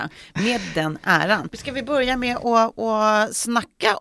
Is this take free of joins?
no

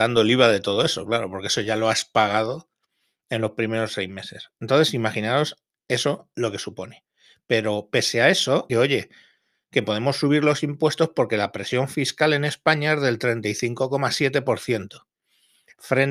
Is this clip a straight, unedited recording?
no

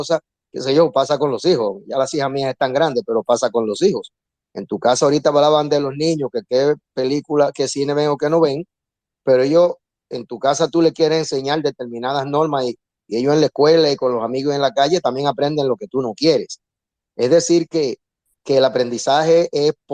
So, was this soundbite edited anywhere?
no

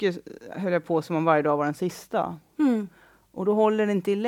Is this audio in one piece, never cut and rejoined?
yes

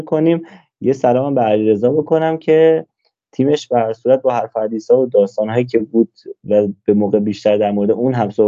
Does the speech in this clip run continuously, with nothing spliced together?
yes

